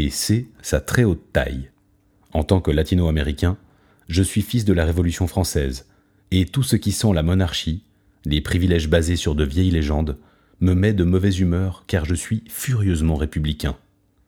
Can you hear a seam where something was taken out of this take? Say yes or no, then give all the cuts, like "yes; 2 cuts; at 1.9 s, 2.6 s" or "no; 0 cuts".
no; 0 cuts